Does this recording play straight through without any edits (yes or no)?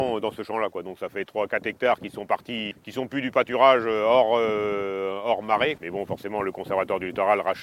no